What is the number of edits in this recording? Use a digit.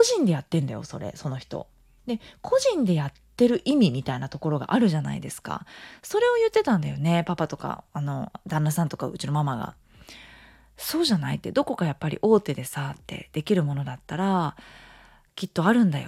0